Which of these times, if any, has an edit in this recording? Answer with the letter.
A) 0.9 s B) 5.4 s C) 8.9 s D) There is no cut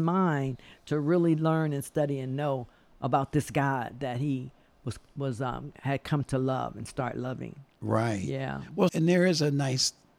C